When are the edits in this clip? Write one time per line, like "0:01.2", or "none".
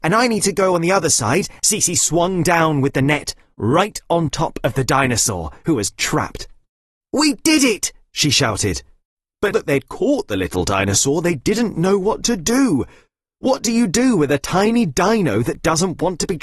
0:01.6
0:09.5